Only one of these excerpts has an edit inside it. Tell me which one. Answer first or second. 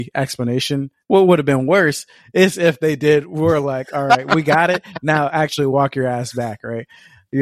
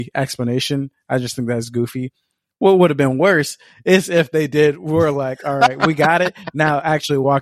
first